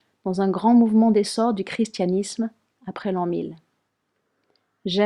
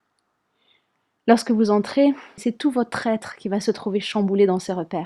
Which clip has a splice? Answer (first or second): second